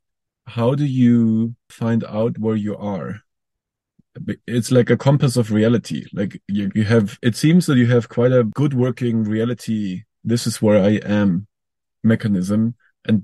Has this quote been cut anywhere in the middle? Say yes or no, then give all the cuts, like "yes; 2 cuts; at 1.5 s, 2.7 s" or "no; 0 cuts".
no; 0 cuts